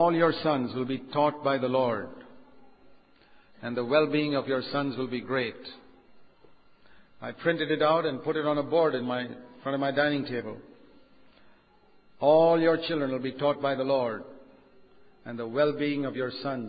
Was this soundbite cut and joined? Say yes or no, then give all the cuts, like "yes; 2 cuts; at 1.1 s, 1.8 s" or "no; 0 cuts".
no; 0 cuts